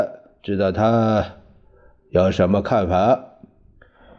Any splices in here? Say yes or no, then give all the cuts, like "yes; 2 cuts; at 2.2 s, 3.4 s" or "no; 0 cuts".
no; 0 cuts